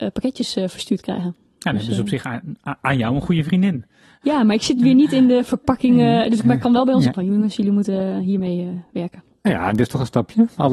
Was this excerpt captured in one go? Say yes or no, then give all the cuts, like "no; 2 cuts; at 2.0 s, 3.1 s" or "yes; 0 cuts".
no; 1 cut; at 7.1 s